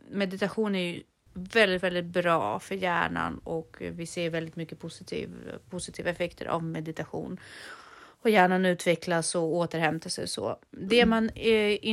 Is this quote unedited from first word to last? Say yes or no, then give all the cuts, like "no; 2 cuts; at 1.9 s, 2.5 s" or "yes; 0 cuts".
yes; 0 cuts